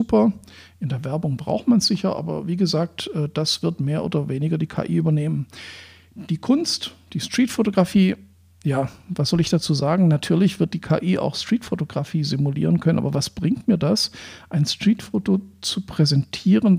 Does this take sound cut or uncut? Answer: uncut